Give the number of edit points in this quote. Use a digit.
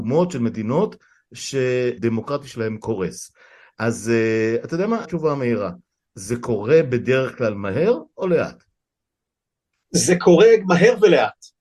2